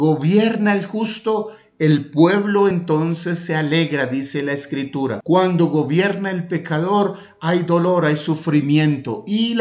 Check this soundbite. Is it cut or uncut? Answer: uncut